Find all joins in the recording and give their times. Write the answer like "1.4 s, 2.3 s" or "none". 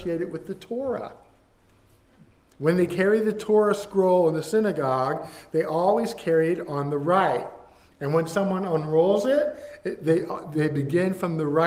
none